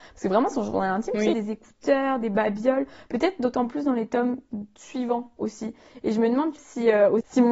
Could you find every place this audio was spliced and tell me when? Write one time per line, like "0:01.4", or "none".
0:01.3
0:06.6